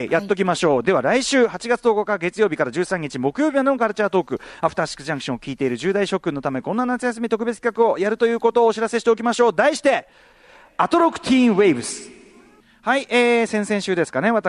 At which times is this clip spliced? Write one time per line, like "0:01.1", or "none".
none